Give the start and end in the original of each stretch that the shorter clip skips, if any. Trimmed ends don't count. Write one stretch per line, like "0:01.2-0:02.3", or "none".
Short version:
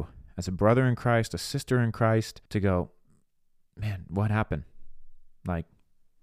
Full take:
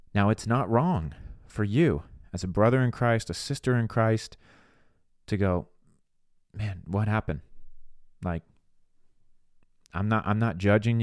0:04.4-0:05.2